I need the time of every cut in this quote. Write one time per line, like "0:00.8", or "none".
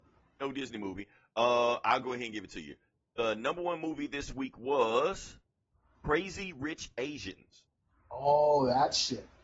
none

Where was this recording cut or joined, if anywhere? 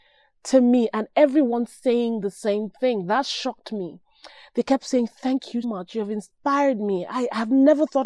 0:05.6

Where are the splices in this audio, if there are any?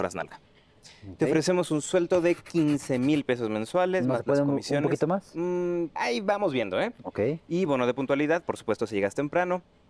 0:06.0
0:07.0

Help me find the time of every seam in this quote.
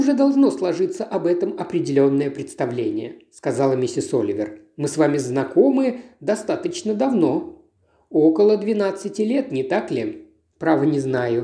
none

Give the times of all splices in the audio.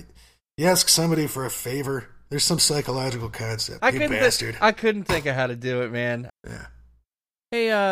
0:03.8
0:06.3

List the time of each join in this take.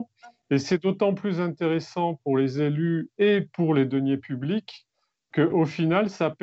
none

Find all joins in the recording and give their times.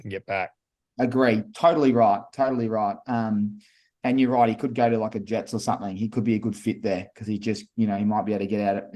none

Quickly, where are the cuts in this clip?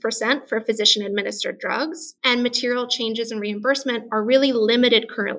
0:02.2

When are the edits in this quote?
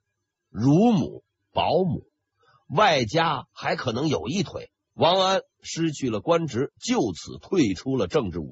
0:04.9

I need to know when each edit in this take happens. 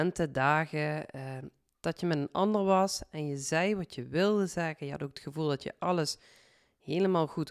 none

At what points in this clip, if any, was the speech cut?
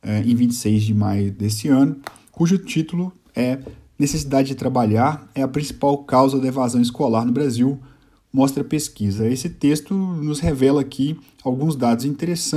none

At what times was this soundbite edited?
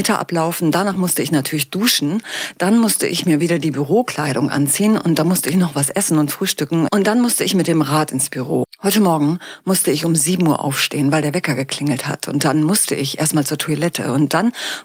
0:06.9
0:08.6

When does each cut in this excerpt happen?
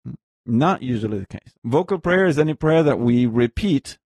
0:01.5

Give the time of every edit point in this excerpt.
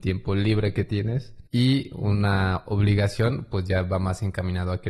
0:01.5

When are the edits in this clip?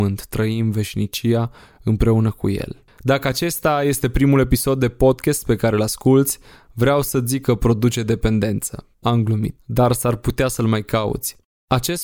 0:08.9

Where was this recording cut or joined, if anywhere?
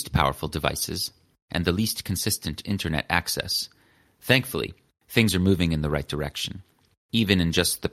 none

